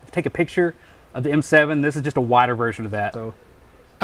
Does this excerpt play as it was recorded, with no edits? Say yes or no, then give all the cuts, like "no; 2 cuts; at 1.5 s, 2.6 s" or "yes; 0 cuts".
no; 1 cut; at 3.1 s